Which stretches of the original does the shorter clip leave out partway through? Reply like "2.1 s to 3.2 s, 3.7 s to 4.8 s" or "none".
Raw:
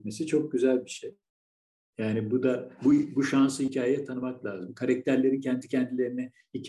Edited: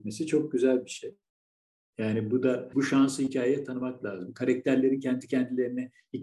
2.7 s to 3.1 s